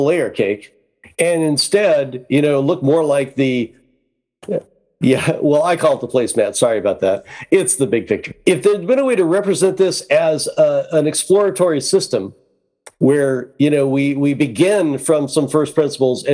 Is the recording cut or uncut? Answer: uncut